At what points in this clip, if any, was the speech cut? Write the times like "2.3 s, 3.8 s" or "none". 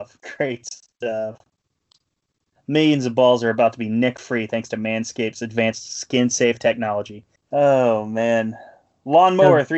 2.6 s, 7.4 s